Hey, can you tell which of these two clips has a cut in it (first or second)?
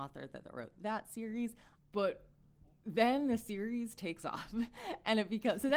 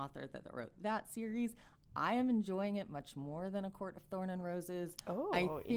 first